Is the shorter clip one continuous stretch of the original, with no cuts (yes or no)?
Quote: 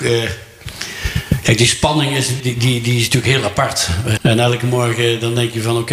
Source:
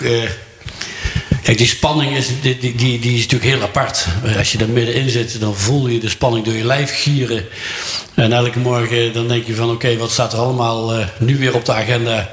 no